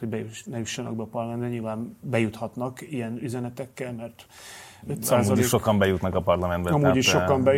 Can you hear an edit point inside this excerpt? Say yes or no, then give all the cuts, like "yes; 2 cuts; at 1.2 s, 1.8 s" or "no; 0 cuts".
yes; 1 cut; at 4.8 s